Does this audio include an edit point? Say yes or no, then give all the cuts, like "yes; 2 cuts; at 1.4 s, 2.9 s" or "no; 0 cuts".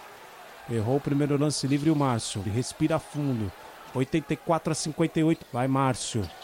yes; 2 cuts; at 2.4 s, 5.4 s